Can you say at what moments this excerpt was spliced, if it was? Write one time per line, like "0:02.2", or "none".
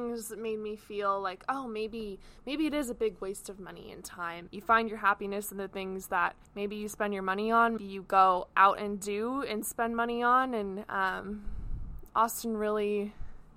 0:04.5
0:06.4
0:07.8